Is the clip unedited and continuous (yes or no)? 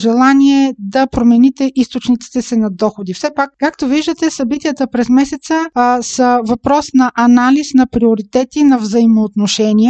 yes